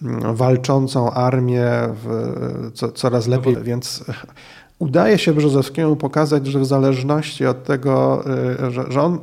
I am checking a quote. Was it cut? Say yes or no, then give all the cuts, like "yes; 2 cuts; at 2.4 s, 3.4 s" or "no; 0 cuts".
yes; 1 cut; at 3.5 s